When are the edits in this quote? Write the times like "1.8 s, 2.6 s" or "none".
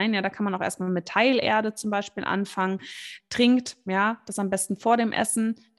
3.2 s